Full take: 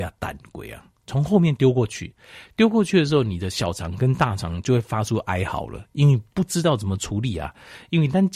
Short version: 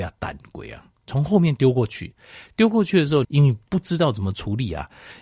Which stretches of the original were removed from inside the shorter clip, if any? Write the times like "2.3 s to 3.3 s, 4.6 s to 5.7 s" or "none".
3.2 s to 5.9 s